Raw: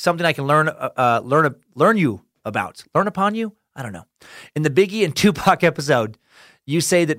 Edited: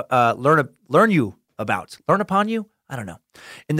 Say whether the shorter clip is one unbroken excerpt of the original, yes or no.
yes